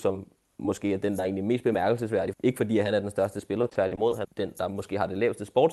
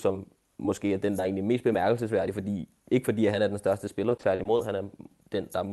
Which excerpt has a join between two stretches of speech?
first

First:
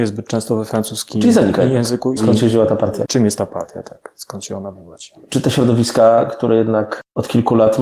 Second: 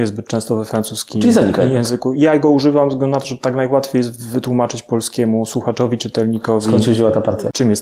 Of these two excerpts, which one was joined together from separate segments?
first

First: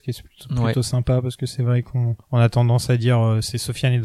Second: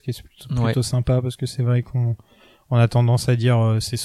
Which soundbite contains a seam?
first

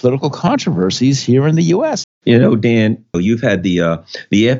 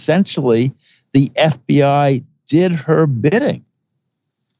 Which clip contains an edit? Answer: first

